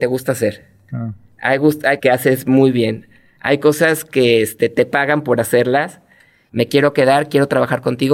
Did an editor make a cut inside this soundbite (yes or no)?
yes